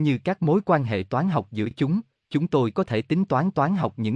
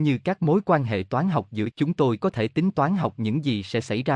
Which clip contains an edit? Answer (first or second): second